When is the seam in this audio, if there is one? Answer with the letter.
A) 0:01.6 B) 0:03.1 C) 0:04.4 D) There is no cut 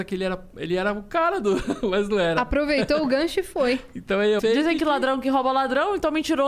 C